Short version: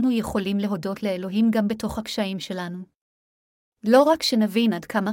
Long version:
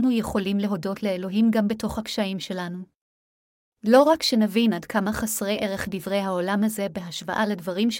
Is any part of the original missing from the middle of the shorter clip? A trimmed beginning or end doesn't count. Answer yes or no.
no